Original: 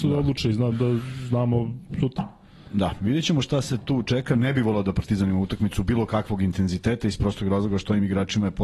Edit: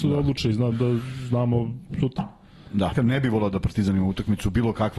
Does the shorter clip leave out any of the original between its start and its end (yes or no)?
yes